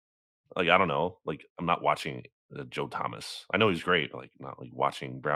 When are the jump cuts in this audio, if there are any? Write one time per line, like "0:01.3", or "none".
none